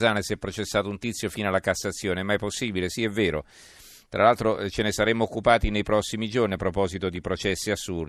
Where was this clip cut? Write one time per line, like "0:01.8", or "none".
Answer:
none